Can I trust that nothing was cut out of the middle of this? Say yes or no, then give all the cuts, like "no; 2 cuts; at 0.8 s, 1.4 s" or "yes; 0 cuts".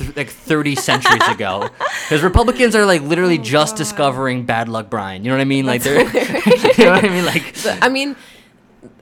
yes; 0 cuts